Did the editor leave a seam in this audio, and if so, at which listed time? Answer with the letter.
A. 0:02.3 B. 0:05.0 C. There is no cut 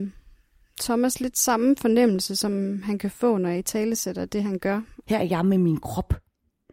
B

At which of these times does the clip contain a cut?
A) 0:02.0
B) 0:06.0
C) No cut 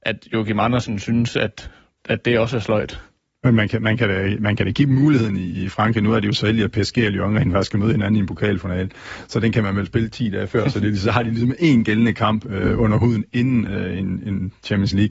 A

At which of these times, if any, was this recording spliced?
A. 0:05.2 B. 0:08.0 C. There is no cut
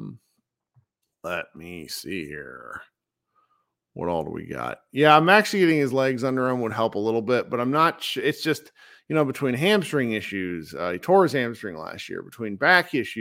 C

